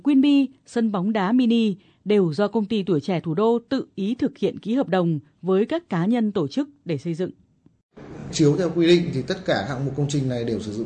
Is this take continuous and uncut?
yes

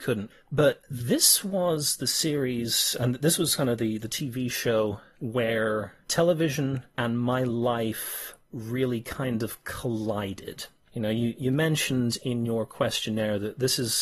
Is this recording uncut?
yes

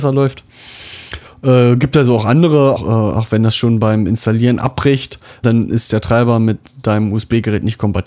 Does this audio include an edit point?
yes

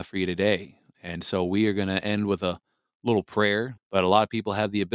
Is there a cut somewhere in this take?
yes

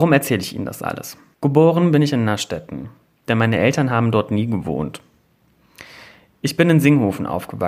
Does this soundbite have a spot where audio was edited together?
yes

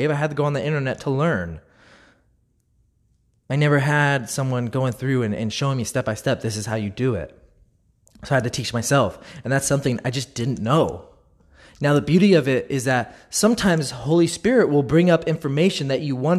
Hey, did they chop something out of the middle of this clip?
no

